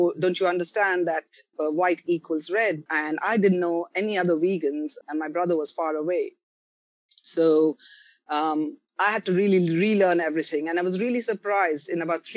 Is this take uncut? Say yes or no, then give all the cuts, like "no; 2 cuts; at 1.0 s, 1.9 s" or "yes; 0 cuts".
no; 2 cuts; at 2.9 s, 5.0 s